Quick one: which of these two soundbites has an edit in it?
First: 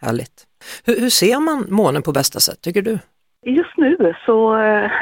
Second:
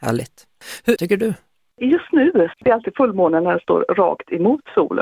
second; 2 cuts; at 1.0 s, 2.5 s

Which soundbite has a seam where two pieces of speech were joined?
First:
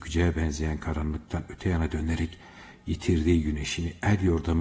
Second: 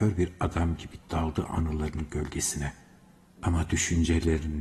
second; 1 cut; at 3.3 s

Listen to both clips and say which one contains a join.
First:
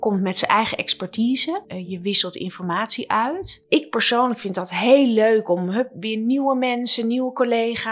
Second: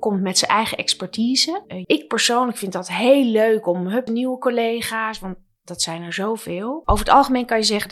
second; 3 cuts; at 1.8 s, 4.1 s, 6.8 s

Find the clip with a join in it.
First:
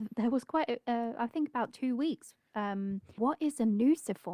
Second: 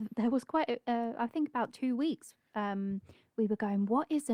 first; 1 cut; at 3.2 s

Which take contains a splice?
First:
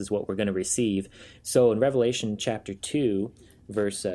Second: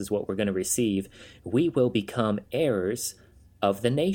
first; 1 cut; at 1.4 s

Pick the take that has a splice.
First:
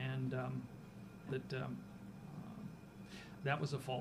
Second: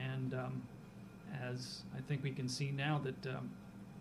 first; 1 cut; at 1.3 s

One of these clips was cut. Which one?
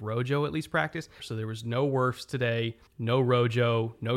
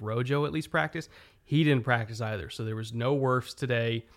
first; 2 cuts; at 1.2 s, 2.9 s

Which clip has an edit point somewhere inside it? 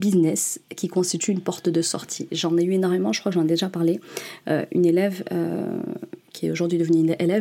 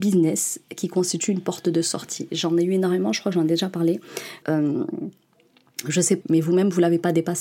second; 2 cuts; at 4.4 s, 6.2 s

